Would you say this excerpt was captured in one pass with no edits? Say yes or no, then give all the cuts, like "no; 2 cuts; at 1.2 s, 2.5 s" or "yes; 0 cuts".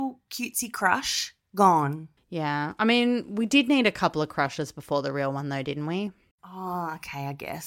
yes; 0 cuts